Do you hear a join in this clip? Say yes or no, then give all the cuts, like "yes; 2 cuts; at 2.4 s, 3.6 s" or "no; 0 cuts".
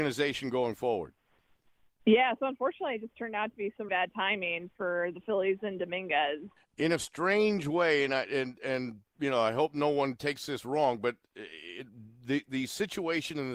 yes; 2 cuts; at 3.9 s, 6.6 s